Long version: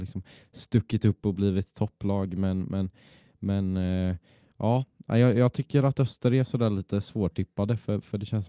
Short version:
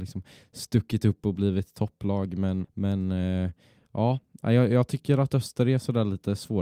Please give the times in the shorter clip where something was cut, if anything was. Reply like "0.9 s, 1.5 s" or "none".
2.6 s